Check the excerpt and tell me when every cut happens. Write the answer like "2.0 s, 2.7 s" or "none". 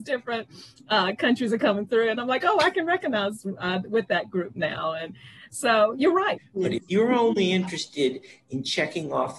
6.4 s

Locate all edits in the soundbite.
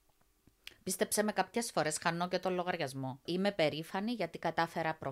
3.3 s

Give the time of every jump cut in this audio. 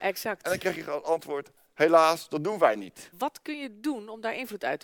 3.1 s

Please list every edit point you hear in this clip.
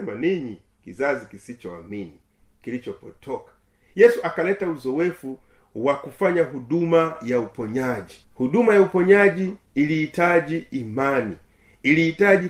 8.2 s

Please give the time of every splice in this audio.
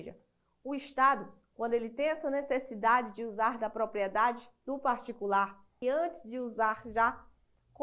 5.8 s

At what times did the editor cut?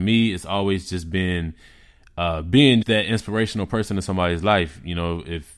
2.8 s

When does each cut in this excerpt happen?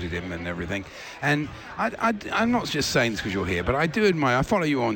none

